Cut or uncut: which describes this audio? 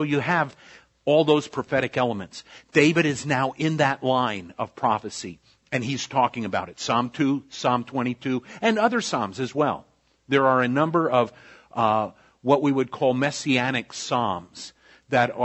uncut